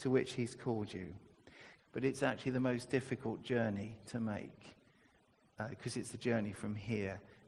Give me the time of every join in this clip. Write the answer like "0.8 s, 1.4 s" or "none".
1.8 s